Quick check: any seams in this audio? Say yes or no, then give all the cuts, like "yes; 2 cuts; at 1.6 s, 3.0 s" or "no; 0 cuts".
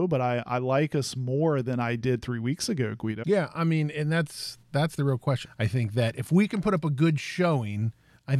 yes; 2 cuts; at 3.2 s, 5.4 s